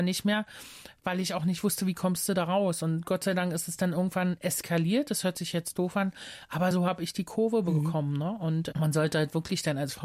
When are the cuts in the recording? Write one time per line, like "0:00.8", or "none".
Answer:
none